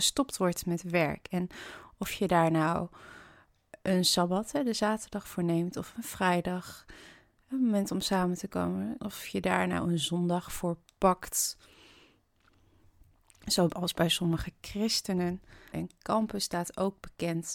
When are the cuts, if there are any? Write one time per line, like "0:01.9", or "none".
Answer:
0:09.0
0:15.7